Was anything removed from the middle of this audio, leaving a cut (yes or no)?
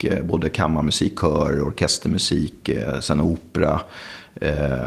no